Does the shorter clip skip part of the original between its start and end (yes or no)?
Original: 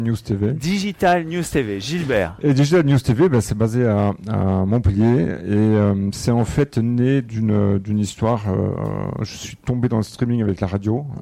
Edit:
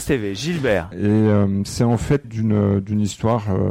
yes